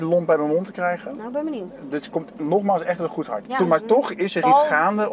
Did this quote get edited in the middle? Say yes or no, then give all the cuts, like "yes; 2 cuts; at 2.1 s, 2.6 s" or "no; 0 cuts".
yes; 1 cut; at 3.5 s